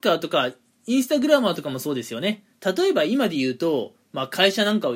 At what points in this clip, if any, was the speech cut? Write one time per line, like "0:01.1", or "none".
0:02.5